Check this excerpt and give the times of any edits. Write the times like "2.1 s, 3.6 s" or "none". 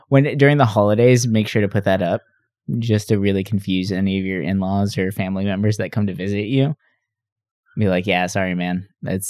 none